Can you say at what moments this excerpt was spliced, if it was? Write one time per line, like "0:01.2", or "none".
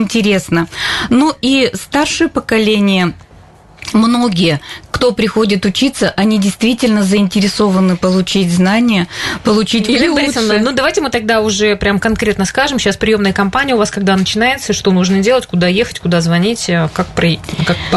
0:09.9